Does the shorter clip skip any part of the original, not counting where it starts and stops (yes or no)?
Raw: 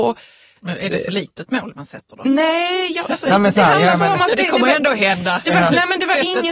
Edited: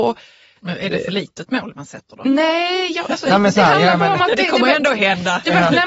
no